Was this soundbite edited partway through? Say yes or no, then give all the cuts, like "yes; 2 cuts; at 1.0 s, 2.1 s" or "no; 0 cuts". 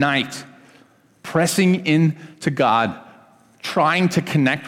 no; 0 cuts